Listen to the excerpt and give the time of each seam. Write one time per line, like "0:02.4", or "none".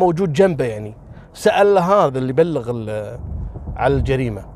0:01.3